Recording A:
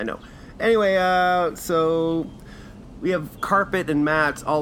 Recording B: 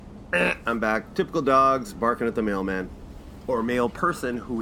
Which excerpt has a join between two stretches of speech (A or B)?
A